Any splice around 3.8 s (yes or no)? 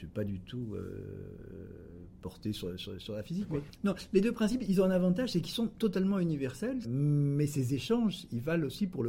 no